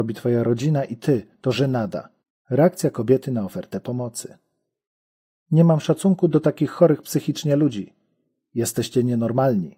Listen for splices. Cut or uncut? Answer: uncut